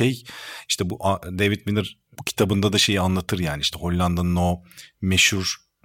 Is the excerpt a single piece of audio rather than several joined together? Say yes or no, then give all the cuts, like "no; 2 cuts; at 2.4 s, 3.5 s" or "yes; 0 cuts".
yes; 0 cuts